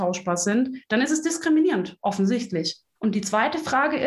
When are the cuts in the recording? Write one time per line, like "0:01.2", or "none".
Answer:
0:03.0